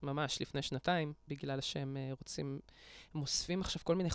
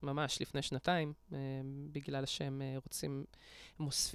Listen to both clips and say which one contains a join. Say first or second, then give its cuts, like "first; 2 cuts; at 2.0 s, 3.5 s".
first; 1 cut; at 1.3 s